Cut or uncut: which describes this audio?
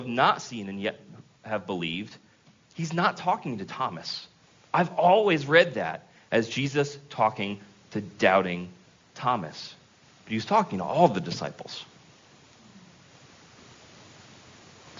uncut